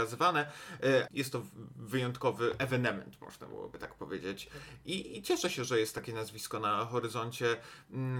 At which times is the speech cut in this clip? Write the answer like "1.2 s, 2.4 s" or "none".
1.1 s